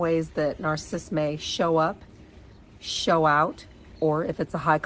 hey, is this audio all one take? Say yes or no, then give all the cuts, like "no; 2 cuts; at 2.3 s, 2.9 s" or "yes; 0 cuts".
yes; 0 cuts